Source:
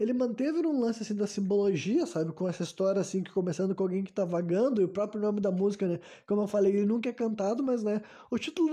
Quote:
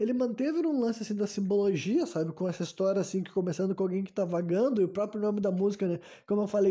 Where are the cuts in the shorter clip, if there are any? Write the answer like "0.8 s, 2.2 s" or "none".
none